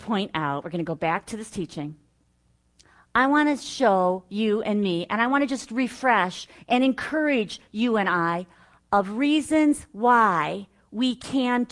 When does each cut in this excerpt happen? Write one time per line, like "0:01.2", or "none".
none